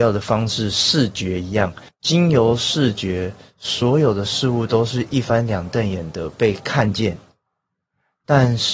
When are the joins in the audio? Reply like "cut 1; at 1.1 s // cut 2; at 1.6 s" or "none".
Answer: none